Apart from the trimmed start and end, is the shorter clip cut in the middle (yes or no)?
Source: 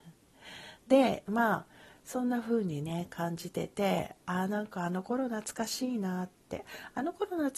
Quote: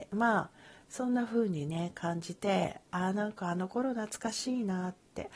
yes